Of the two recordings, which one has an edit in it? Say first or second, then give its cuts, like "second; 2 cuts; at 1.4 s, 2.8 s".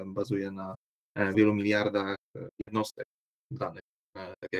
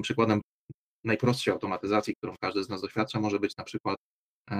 first; 1 cut; at 1.3 s